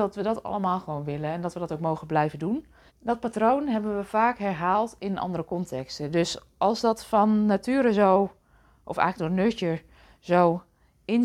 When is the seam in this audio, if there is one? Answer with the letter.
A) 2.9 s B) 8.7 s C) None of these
A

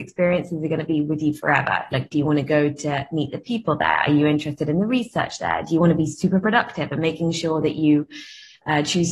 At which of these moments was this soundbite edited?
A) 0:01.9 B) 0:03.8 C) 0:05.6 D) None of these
A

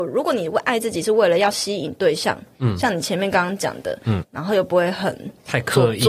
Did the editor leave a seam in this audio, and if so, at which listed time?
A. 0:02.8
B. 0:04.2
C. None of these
B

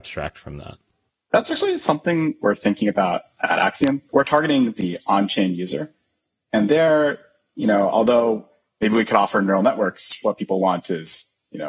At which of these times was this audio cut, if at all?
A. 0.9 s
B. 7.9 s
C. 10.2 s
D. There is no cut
C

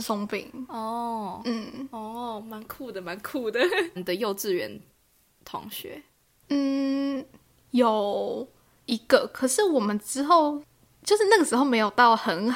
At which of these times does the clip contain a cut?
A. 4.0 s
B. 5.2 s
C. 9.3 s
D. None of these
A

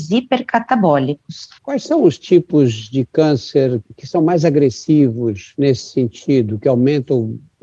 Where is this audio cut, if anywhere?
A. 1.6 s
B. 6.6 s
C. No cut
A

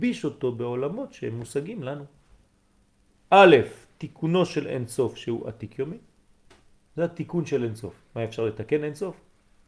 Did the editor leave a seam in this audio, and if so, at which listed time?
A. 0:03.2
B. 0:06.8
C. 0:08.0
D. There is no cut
A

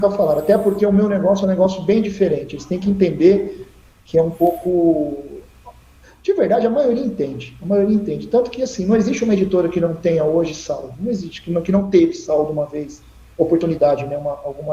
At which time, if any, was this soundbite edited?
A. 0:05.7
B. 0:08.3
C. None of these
C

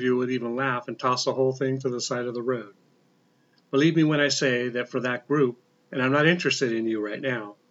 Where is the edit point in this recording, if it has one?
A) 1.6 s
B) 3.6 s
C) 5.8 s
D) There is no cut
C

